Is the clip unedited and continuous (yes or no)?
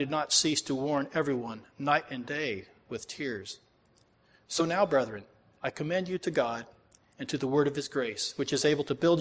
yes